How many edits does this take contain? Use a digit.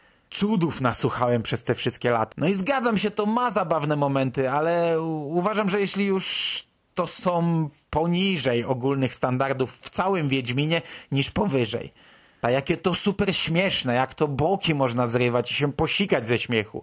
2